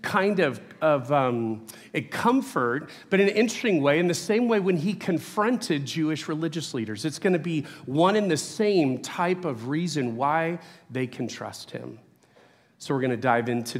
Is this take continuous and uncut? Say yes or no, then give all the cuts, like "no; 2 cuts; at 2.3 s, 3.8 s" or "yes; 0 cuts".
yes; 0 cuts